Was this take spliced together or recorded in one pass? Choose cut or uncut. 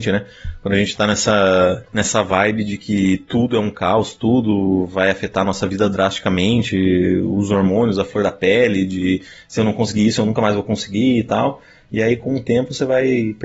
uncut